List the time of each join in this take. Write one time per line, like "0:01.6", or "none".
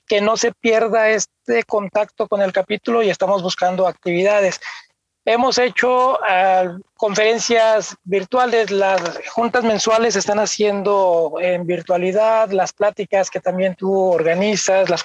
none